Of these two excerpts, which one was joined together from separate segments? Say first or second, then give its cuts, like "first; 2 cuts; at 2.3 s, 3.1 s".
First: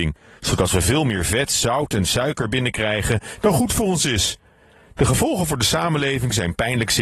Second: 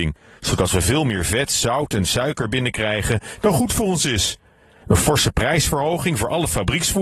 second; 1 cut; at 4.8 s